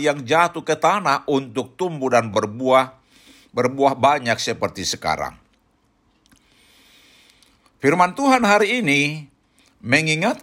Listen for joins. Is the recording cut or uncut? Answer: uncut